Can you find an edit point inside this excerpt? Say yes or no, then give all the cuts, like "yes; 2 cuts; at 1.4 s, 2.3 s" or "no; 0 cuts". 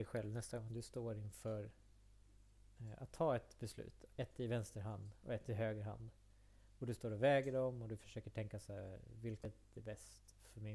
yes; 1 cut; at 4.1 s